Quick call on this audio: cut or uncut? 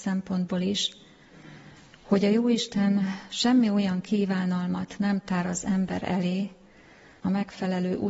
cut